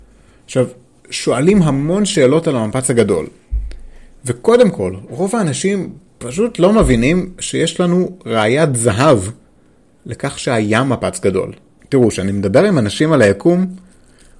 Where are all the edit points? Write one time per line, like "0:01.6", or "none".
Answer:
0:11.8